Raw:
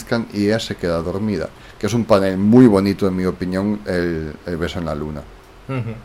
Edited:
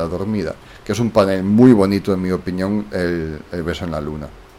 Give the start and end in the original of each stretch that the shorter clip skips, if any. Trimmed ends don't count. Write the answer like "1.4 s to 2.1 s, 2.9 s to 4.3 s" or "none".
none